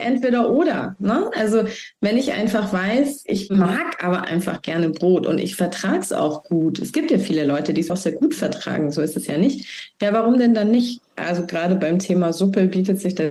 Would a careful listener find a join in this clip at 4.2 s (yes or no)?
no